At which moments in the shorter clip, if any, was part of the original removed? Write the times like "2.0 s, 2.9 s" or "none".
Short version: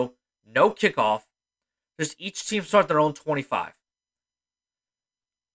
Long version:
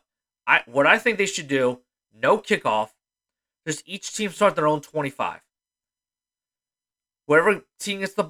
none